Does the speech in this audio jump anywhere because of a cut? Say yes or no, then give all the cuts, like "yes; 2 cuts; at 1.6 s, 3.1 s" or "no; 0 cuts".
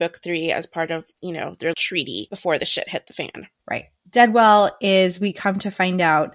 yes; 1 cut; at 1.7 s